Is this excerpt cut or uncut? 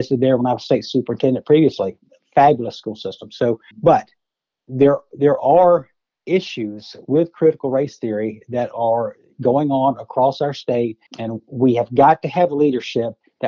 cut